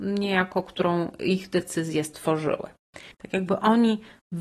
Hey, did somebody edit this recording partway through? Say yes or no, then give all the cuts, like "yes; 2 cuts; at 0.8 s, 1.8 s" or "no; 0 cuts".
yes; 1 cut; at 3.1 s